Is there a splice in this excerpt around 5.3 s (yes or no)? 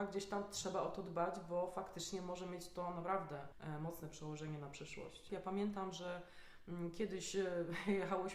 yes